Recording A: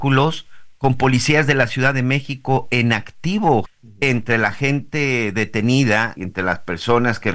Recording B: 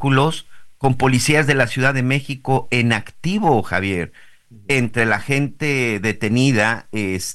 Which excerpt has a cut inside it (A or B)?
A